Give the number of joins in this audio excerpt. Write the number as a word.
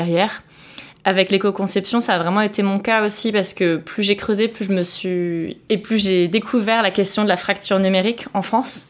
zero